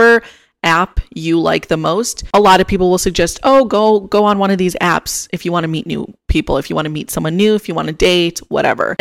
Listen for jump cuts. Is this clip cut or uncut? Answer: uncut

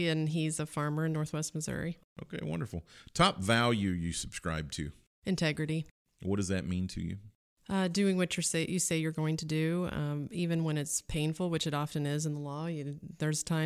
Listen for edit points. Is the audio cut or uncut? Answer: uncut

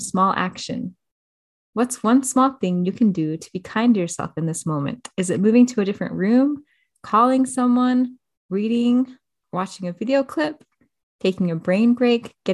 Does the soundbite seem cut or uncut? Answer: uncut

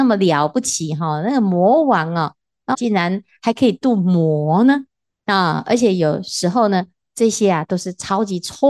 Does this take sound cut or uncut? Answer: cut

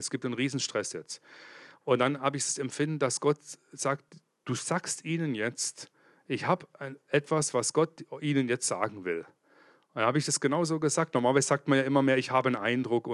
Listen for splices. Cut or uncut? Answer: uncut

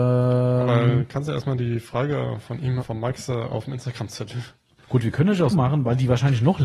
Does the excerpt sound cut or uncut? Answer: cut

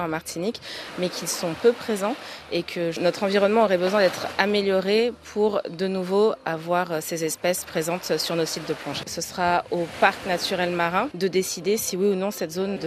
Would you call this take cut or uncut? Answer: cut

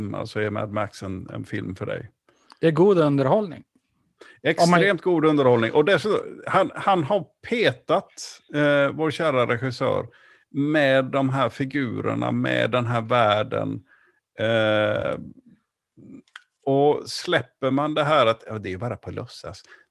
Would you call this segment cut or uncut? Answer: uncut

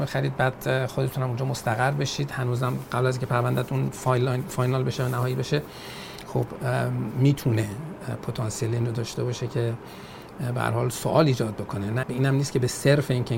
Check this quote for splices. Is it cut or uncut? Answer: cut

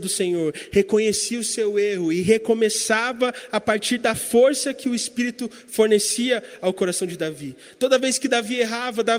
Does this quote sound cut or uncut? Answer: uncut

